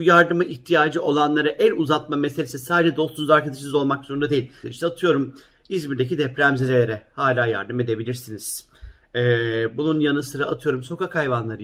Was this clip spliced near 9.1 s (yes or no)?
no